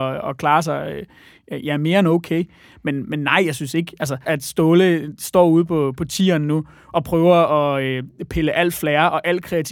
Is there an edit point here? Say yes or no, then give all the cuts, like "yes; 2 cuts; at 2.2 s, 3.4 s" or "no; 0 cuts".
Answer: yes; 1 cut; at 4.2 s